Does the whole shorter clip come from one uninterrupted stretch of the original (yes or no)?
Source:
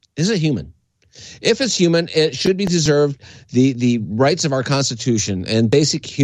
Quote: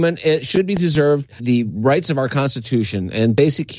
no